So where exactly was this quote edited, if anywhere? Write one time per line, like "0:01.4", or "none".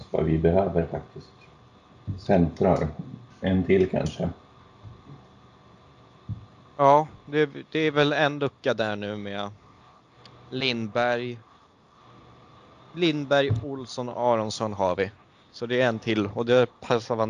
none